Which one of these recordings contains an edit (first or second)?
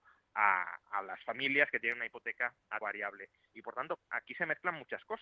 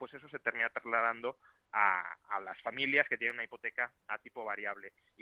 first